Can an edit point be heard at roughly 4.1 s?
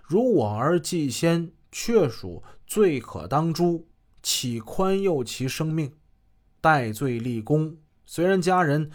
no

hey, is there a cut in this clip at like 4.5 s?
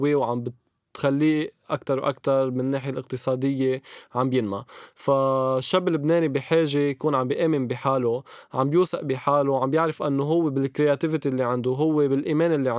no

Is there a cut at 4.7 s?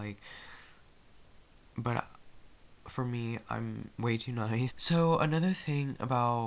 yes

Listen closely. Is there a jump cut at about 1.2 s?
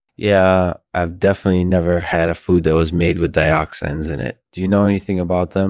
no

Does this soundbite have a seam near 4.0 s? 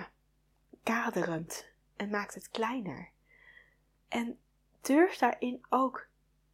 yes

